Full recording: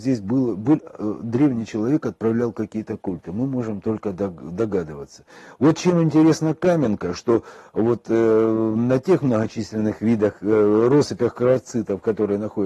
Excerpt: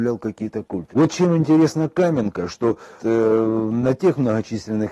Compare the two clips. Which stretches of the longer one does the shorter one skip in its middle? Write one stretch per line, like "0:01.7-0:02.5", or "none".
0:03.2-0:05.6
0:07.6-0:08.0